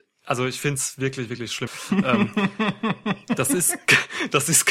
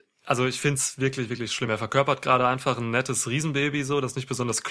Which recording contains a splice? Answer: first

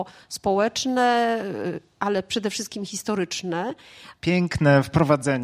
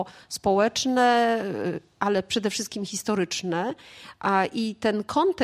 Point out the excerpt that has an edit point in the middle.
first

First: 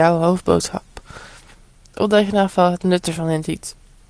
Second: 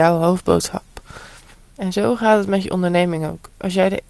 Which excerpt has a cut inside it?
second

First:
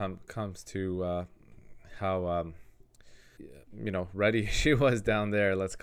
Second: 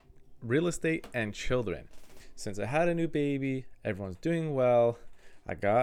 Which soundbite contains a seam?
first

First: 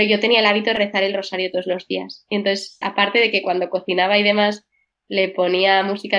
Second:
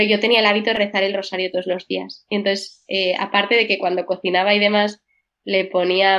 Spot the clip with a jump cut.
first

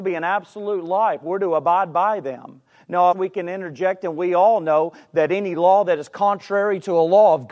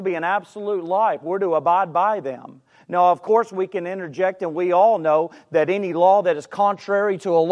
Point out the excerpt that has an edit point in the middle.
first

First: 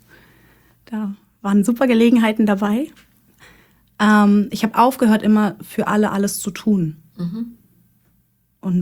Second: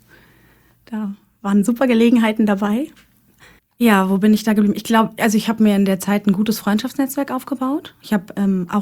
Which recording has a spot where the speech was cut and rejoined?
second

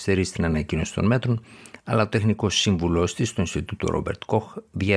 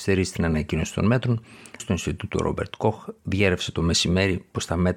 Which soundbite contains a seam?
second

